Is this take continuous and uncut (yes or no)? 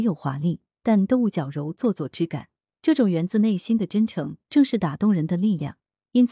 yes